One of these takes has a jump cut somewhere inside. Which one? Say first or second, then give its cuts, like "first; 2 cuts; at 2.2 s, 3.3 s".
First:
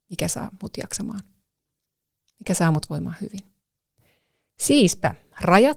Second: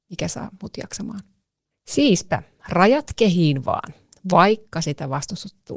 second; 1 cut; at 1.7 s